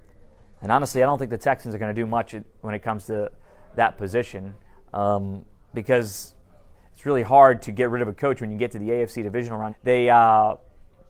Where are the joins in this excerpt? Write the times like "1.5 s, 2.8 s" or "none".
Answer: 9.7 s